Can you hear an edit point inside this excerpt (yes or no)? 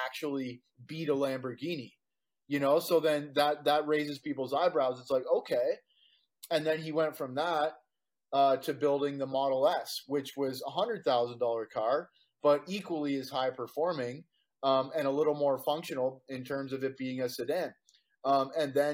no